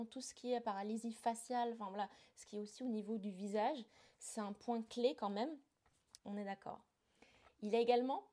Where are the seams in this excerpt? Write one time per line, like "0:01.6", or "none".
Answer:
0:06.2